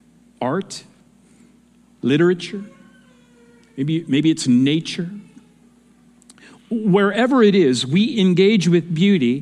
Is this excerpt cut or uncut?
cut